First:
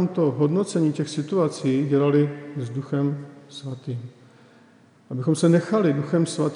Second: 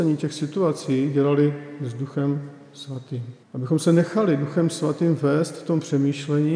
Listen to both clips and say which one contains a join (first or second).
second